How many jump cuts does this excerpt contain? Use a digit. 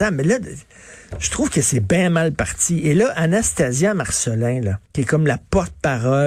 1